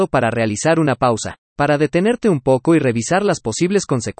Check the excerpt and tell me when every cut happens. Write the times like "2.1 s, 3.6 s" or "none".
1.5 s